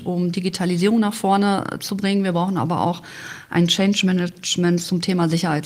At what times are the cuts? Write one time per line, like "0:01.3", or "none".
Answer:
none